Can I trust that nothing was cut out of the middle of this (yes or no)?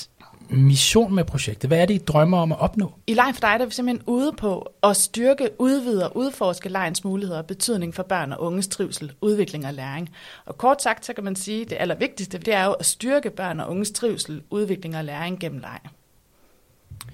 no